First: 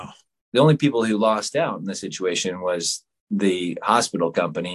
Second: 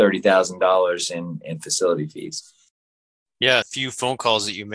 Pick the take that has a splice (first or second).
second